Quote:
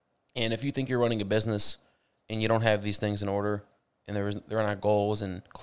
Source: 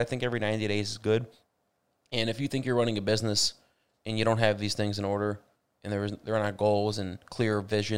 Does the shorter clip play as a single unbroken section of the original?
yes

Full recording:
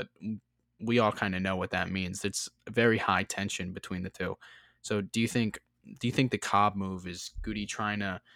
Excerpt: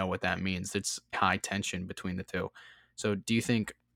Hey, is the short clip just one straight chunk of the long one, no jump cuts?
no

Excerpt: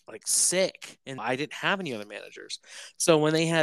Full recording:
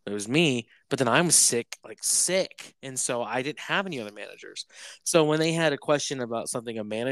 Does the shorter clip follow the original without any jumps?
no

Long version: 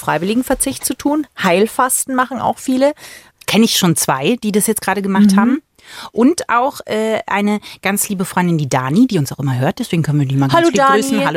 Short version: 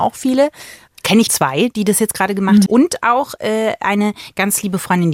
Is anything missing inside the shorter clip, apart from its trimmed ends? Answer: yes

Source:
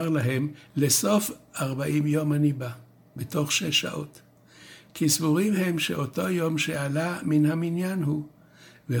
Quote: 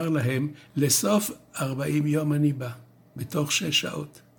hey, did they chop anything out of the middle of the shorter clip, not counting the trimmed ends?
no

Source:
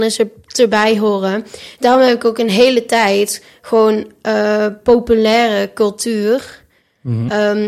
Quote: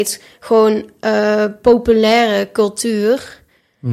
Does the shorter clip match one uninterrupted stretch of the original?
yes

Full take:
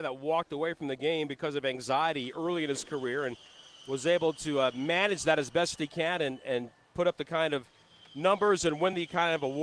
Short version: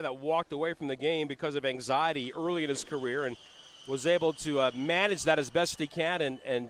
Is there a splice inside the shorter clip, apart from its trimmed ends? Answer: no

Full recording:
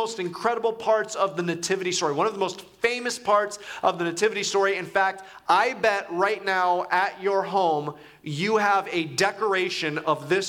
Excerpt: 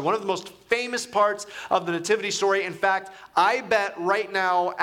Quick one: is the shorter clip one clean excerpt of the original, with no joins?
yes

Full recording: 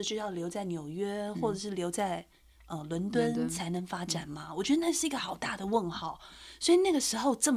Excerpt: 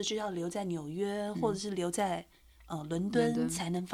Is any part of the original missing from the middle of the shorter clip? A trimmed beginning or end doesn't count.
no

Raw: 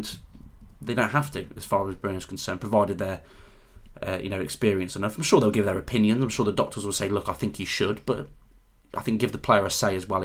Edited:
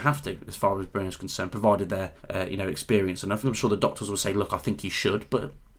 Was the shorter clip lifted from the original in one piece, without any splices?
no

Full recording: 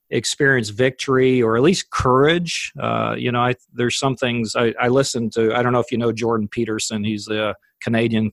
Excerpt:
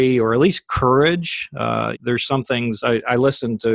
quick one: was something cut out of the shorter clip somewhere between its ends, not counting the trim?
yes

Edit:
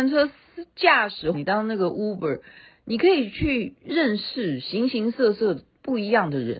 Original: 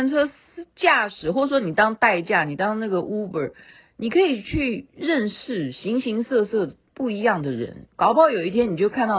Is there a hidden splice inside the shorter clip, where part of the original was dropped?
yes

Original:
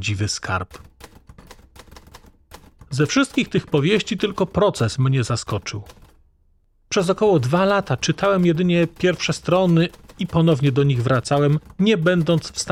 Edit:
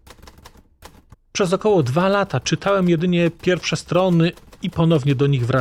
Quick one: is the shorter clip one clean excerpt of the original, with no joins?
no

